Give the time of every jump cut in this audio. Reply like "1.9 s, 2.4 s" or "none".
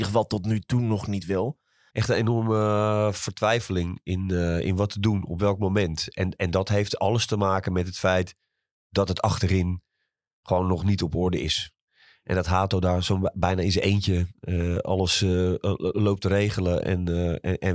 1.9 s, 16.8 s